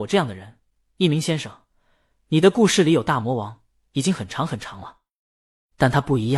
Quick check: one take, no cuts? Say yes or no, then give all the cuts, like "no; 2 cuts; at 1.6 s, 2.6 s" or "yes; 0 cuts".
yes; 0 cuts